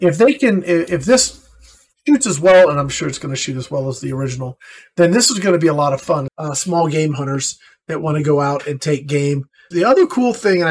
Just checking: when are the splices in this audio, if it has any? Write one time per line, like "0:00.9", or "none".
0:06.3
0:09.7

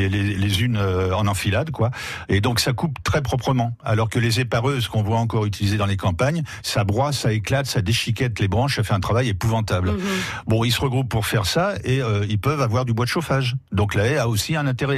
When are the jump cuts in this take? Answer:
none

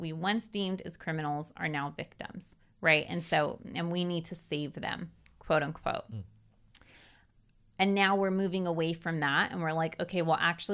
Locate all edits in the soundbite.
none

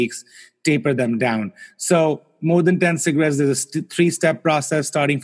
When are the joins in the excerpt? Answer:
none

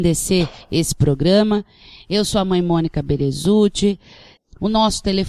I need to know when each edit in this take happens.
0:04.4

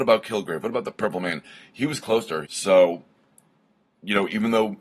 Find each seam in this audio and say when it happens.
0:02.4

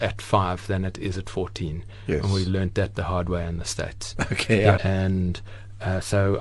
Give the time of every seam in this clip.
0:04.8

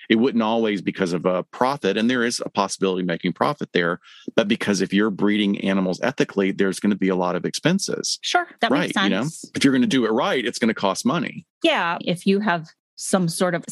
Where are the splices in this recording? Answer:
0:12.0

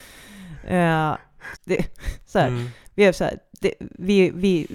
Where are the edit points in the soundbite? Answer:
0:01.5

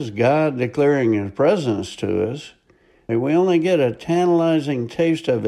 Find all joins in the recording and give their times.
0:03.1

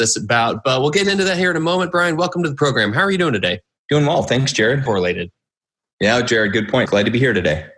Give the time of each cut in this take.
0:04.9
0:06.9

